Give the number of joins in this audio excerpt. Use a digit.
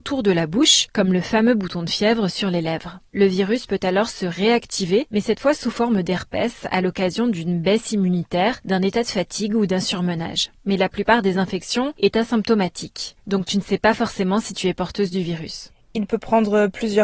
1